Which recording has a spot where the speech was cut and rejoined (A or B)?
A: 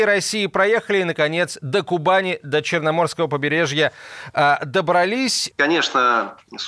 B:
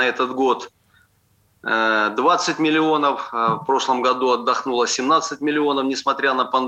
A